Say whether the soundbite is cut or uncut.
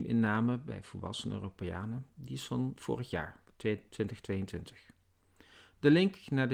uncut